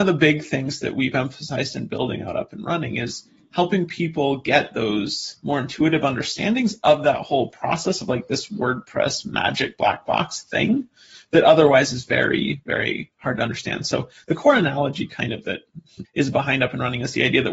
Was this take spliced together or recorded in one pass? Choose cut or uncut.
cut